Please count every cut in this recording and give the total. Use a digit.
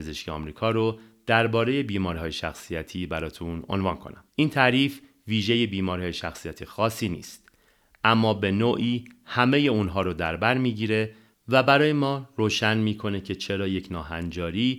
1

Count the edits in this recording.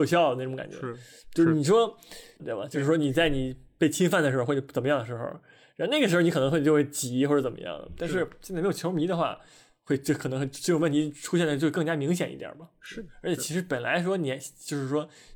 1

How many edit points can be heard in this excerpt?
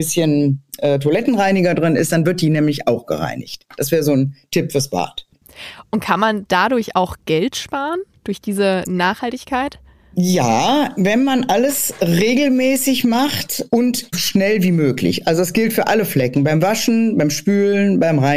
1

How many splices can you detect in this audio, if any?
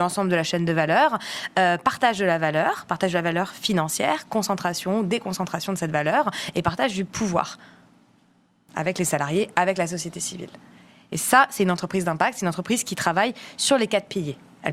0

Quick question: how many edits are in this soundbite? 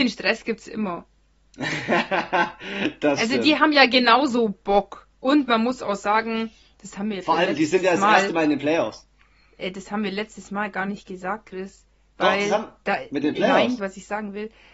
1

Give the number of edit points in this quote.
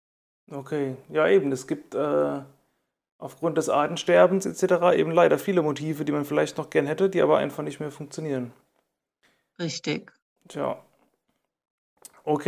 0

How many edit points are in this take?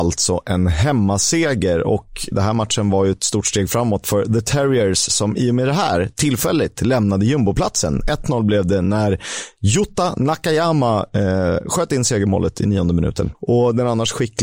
2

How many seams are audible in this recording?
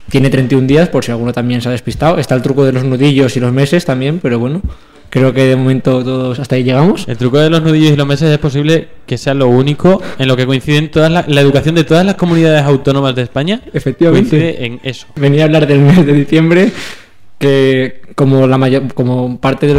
0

